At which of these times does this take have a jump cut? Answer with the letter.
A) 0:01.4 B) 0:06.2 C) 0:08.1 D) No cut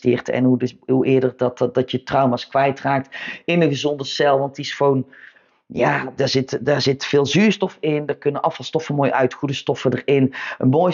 B